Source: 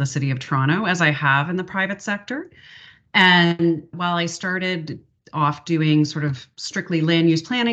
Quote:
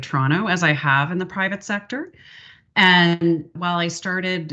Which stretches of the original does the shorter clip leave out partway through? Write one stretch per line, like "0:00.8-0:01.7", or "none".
none